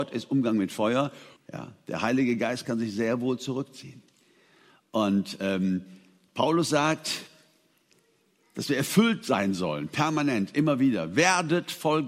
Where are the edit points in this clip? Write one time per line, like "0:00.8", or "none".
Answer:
0:01.4

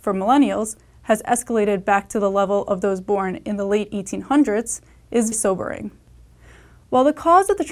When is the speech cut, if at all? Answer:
0:05.3

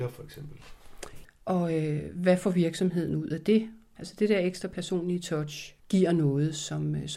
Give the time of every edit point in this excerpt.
0:01.2
0:04.0
0:05.8

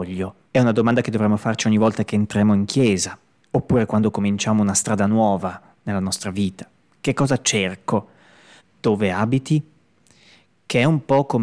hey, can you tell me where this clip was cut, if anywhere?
0:08.6

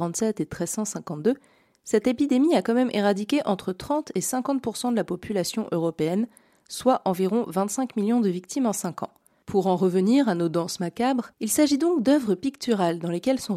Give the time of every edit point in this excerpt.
0:09.4
0:11.3

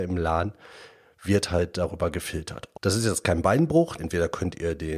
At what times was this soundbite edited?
0:02.7
0:04.0

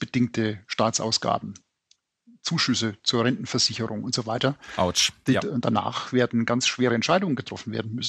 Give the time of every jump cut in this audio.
0:05.4

